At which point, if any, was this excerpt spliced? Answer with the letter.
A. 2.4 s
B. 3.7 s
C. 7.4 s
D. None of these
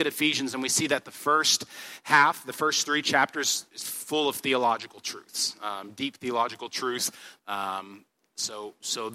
C